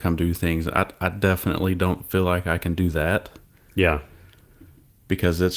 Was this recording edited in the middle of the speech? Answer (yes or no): no